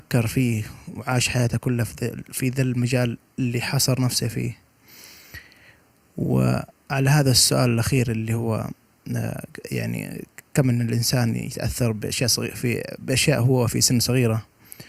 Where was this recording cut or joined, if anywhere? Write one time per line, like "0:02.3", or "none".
none